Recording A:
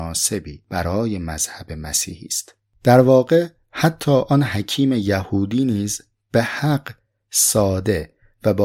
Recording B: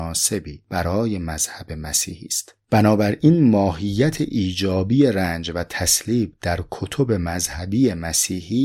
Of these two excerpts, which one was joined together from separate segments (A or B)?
B